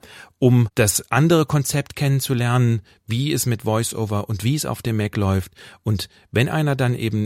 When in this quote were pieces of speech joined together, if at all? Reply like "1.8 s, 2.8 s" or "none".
none